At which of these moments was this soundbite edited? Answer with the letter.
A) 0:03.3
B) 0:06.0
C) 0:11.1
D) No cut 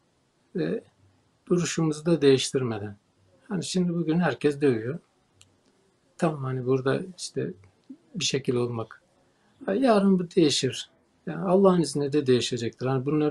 C